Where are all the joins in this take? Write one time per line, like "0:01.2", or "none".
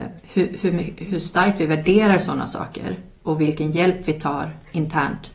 0:03.2